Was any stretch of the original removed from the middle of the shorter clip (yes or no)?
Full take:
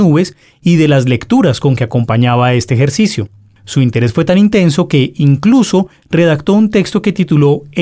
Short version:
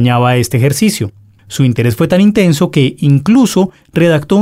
no